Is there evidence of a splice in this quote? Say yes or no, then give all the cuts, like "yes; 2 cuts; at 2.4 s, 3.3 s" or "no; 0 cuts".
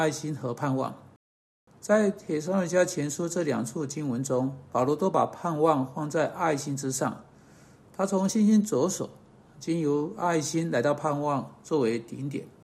no; 0 cuts